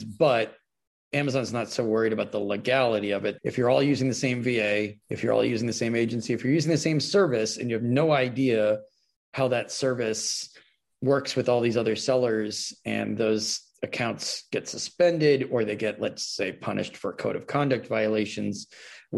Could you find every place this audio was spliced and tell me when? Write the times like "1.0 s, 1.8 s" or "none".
3.4 s, 5.0 s